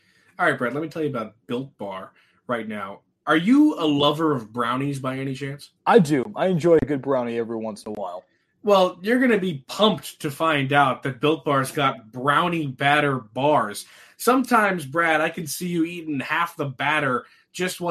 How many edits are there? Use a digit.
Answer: 1